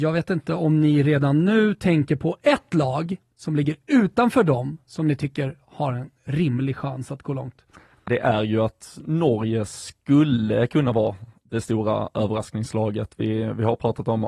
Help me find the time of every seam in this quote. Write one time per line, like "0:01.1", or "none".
0:08.1